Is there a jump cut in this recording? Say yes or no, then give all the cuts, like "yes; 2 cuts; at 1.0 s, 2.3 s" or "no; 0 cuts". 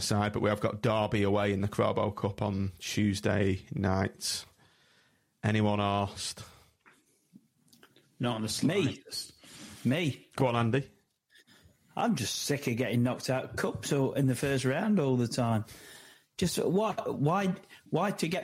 no; 0 cuts